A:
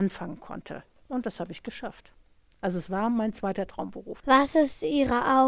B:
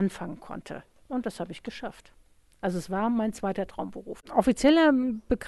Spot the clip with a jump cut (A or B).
B